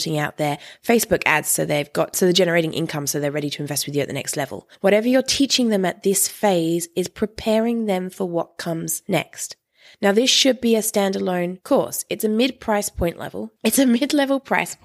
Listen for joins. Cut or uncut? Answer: cut